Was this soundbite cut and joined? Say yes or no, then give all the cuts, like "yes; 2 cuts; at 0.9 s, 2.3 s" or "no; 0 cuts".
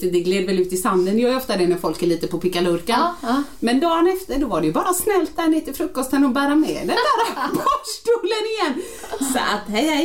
no; 0 cuts